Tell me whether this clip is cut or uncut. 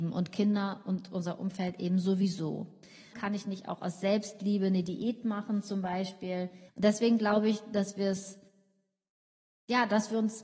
cut